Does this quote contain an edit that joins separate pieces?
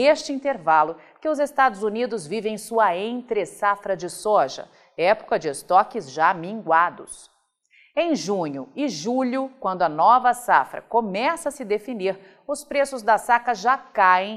no; 0 cuts

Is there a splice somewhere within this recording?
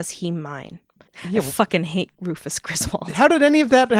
yes; 1 cut; at 1.1 s

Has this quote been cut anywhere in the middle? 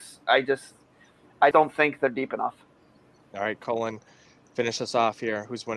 yes; 1 cut; at 1.5 s

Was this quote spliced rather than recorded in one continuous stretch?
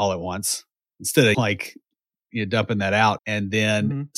yes; 2 cuts; at 1.3 s, 3.2 s

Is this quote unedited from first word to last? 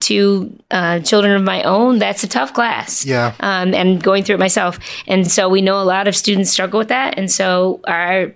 yes; 0 cuts

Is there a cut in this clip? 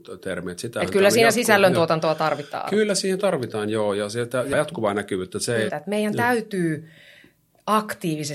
yes; 2 cuts; at 4.5 s, 5.7 s

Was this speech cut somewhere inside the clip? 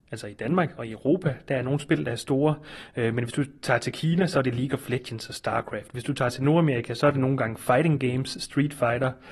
no; 0 cuts

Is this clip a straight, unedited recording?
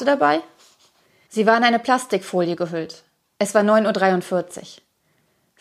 no; 2 cuts; at 1.3 s, 3.4 s

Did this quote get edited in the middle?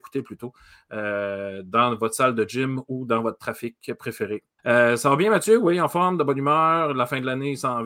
yes; 1 cut; at 4.6 s

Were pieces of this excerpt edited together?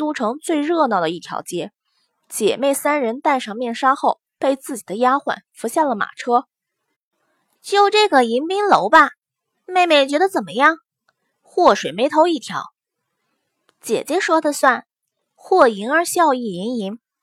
no; 0 cuts

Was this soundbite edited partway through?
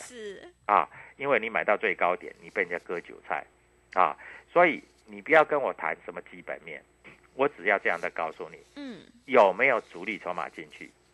no; 0 cuts

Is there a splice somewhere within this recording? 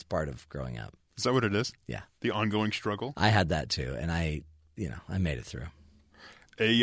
no; 0 cuts

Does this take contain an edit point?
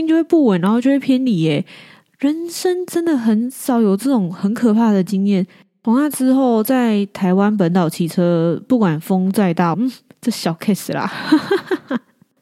yes; 1 cut; at 9.7 s

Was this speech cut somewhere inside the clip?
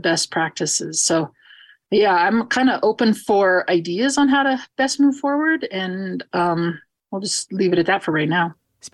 no; 0 cuts

